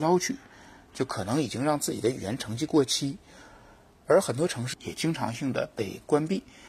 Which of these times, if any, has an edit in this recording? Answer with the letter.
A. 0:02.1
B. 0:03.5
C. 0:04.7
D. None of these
C